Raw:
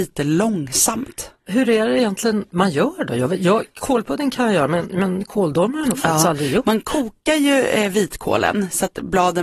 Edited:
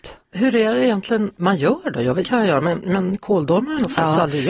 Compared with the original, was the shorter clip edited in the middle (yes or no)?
yes